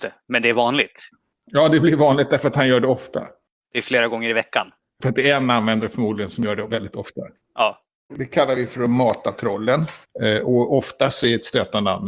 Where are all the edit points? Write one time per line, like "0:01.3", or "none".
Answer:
0:08.1
0:10.0